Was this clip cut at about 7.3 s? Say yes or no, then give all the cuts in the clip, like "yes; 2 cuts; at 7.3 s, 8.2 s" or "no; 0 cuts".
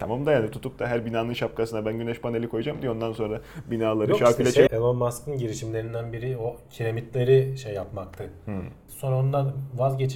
no; 2 cuts; at 4.7 s, 8.9 s